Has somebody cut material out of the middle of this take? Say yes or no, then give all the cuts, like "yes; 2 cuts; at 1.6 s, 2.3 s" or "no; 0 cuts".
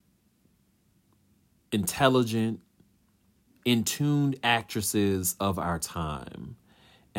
yes; 1 cut; at 3.5 s